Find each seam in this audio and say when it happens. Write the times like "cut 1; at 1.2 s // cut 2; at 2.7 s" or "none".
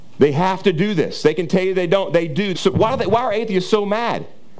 cut 1; at 2.5 s